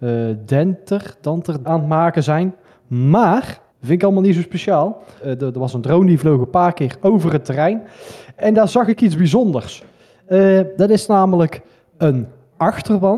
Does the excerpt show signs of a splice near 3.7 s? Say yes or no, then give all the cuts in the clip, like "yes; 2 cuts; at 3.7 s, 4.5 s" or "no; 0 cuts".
yes; 3 cuts; at 1.6 s, 3.7 s, 5.2 s